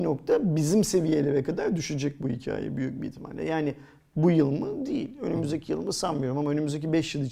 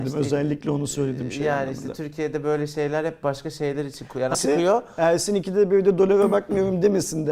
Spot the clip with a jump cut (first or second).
second